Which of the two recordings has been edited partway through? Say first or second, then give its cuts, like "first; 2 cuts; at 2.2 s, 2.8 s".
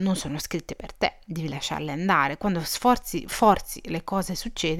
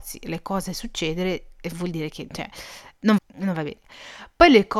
second; 1 cut; at 3.2 s